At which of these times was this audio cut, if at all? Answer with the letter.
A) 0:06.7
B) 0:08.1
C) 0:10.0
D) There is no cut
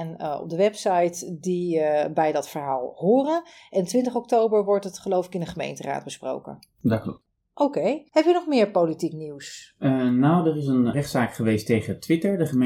D